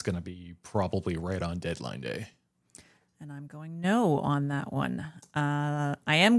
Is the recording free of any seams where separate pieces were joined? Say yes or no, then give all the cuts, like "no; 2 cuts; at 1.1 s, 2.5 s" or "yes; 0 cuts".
yes; 0 cuts